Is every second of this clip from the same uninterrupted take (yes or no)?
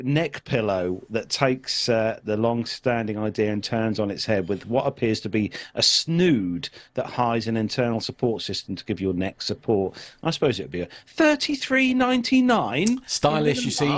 yes